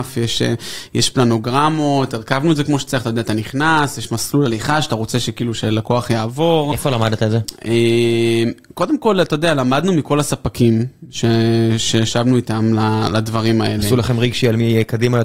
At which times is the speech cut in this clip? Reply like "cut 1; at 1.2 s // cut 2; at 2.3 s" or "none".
none